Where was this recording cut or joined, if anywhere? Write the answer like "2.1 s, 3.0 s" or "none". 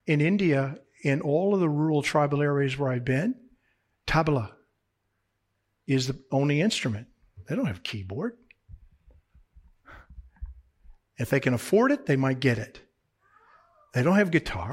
none